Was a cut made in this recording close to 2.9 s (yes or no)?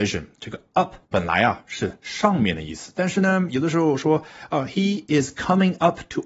no